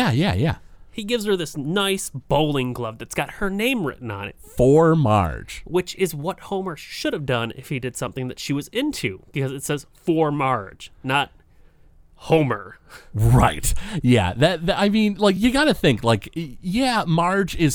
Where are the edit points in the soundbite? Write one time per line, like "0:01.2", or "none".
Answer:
none